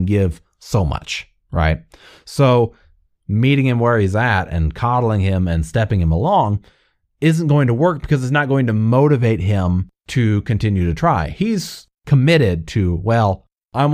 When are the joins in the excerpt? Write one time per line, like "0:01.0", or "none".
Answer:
0:03.1